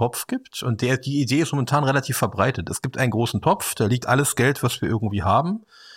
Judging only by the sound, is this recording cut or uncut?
uncut